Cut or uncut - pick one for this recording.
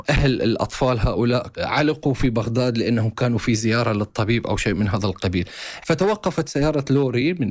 cut